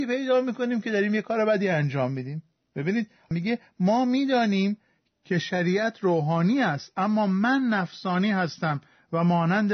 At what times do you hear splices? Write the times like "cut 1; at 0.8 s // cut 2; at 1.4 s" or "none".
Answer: none